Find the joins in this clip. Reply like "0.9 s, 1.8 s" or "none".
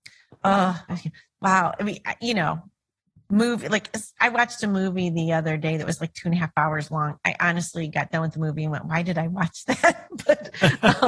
none